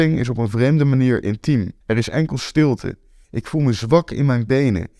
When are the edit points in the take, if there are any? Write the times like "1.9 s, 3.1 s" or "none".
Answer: 1.8 s, 3.2 s